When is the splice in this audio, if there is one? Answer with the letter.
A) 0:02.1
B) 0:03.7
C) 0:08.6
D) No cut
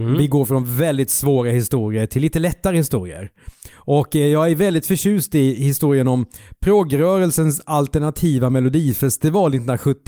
D